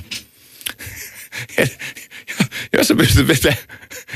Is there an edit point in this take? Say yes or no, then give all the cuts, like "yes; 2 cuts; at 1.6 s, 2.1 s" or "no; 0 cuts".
yes; 1 cut; at 2.7 s